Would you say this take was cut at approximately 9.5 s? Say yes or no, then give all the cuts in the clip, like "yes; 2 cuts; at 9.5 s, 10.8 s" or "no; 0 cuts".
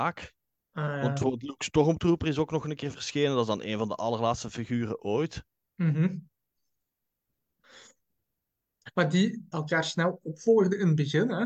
yes; 1 cut; at 9.5 s